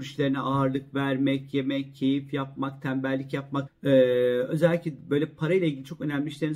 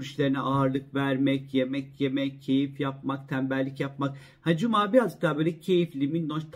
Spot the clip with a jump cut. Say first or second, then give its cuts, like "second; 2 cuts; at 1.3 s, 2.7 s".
first; 2 cuts; at 1.5 s, 3.7 s